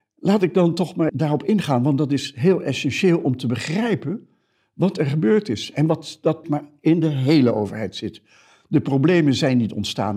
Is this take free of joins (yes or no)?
no